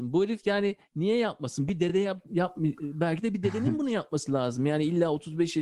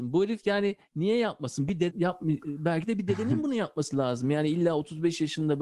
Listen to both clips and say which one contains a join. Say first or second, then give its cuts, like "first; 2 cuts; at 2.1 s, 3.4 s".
second; 1 cut; at 1.9 s